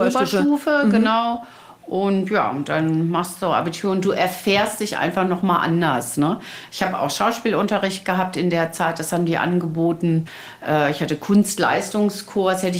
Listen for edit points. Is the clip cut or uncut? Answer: uncut